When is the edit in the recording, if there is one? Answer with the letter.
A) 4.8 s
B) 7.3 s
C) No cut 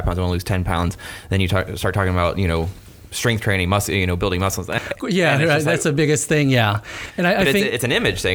A